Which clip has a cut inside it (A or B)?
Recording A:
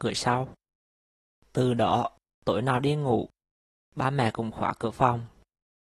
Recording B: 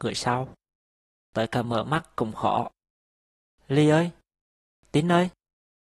B